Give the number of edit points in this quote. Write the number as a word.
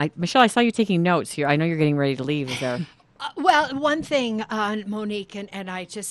zero